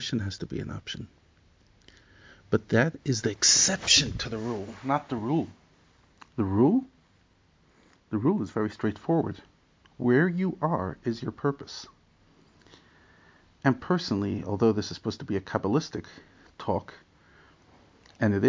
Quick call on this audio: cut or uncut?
uncut